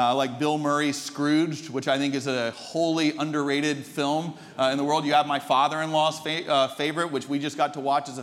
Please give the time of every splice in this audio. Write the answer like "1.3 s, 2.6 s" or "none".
none